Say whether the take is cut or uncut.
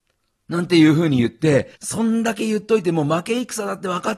cut